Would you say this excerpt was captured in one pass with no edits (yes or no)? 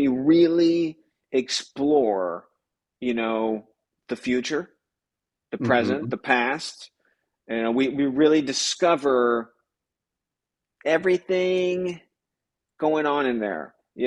yes